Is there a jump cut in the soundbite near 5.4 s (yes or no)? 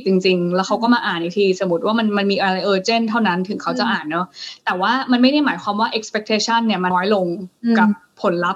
no